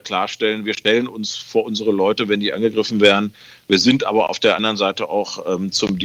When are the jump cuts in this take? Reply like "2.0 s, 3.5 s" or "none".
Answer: none

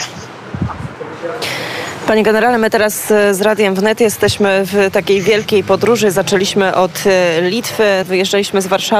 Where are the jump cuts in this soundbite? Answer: 8.0 s

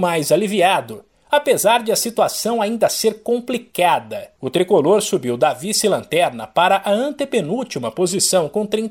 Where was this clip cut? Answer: 4.4 s

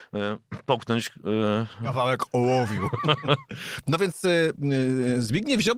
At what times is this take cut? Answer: none

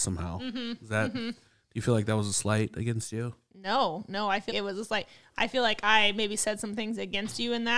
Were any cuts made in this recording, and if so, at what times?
4.5 s

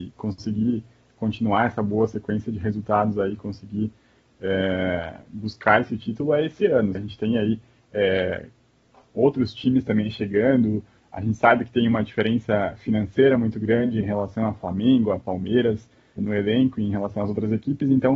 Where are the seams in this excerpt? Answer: 6.9 s, 16.2 s

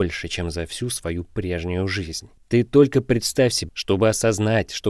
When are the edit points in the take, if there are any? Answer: 2.4 s, 3.7 s

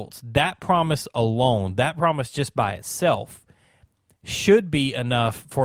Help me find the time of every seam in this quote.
none

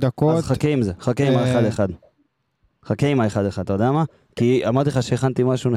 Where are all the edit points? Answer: none

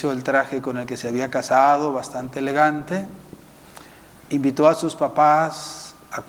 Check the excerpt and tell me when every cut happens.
none

